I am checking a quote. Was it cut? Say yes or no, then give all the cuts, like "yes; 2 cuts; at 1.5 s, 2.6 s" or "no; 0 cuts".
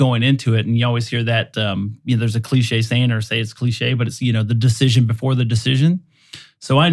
no; 0 cuts